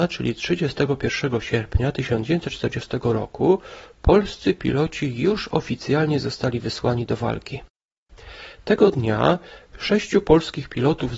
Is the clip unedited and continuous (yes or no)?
yes